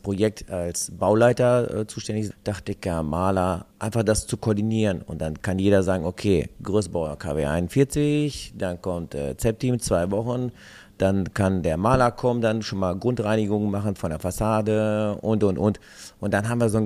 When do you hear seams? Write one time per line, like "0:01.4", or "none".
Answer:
0:02.3